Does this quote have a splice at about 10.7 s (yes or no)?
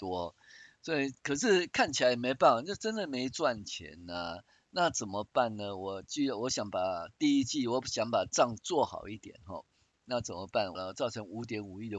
yes